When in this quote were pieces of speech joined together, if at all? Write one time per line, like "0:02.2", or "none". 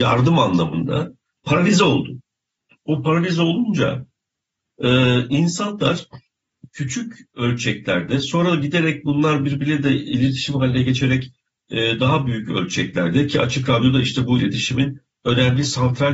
none